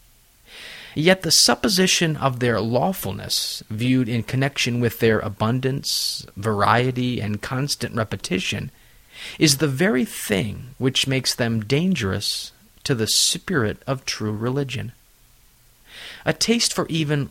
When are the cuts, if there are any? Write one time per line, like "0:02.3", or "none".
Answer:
none